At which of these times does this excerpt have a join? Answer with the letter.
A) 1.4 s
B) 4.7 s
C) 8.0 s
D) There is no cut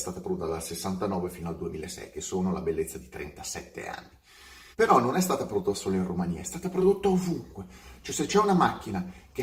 B